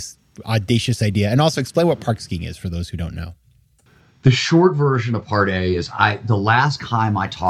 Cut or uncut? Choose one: uncut